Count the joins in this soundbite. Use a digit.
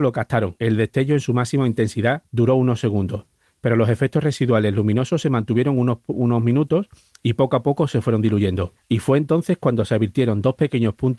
0